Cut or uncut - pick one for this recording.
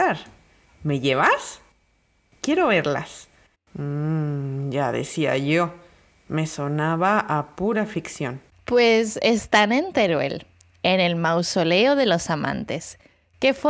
cut